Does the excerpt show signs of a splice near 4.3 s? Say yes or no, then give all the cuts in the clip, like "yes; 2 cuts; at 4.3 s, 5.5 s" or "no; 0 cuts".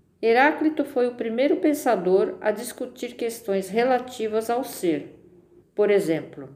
no; 1 cut; at 5.6 s